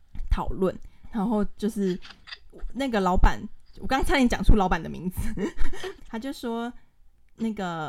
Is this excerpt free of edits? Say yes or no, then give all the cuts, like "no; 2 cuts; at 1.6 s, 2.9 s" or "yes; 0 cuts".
no; 2 cuts; at 1.0 s, 6.0 s